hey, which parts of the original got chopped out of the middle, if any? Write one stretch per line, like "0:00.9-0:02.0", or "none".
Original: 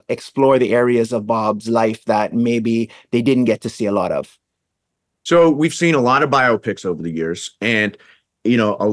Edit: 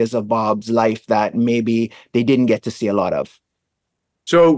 none